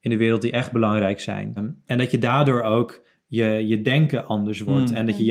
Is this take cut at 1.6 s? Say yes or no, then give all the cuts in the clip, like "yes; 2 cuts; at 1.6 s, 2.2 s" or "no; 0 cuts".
yes; 1 cut; at 1.6 s